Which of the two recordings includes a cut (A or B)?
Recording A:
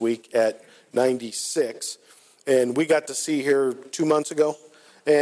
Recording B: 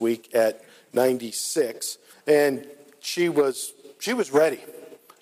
B